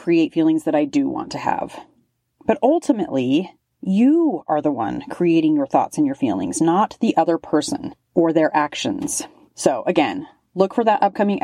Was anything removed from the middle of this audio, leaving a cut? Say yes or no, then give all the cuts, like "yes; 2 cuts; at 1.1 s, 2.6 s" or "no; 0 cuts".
no; 0 cuts